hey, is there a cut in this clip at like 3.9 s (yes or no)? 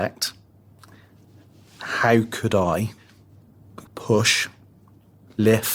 yes